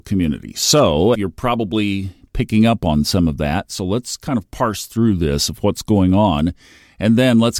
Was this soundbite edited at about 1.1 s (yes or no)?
yes